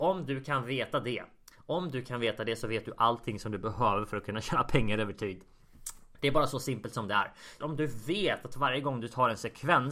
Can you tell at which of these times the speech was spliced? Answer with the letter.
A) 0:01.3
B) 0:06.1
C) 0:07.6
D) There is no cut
C